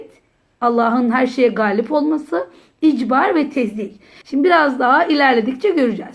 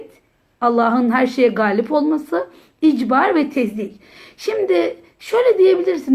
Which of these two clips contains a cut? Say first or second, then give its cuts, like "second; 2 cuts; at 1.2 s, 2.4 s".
first; 1 cut; at 4.2 s